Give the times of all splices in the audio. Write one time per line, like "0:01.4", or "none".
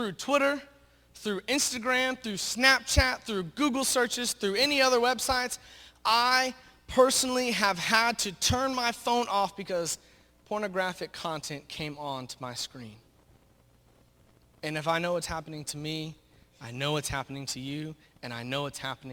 none